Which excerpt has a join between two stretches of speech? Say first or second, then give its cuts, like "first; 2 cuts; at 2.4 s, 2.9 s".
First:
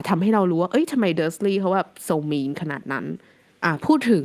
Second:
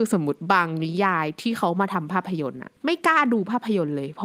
second; 1 cut; at 2.8 s